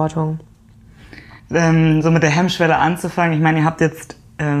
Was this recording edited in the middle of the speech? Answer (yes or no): yes